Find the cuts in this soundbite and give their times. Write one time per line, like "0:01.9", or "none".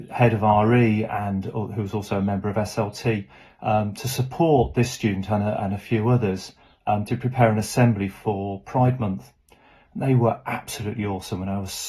none